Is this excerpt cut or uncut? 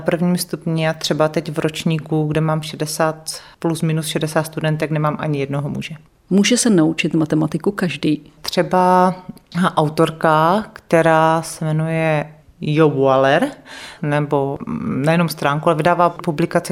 cut